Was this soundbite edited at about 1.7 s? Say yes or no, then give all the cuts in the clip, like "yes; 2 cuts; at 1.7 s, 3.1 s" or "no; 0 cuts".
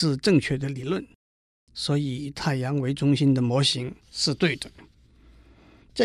yes; 2 cuts; at 1.7 s, 4.0 s